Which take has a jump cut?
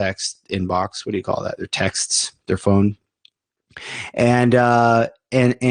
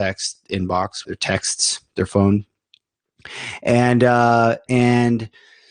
second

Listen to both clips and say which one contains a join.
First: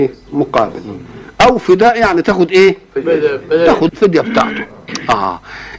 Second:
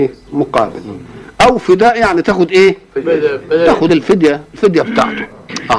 first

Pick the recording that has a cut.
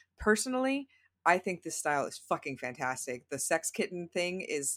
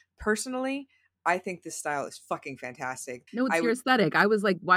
second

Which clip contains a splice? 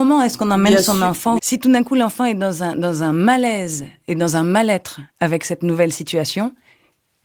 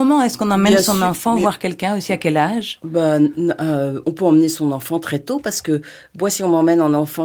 first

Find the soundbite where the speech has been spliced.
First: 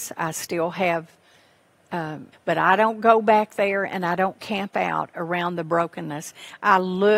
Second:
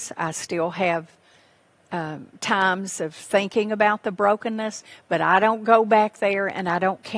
first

